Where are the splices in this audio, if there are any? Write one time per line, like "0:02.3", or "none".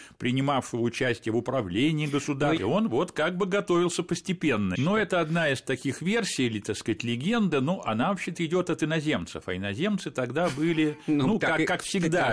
0:02.6
0:04.8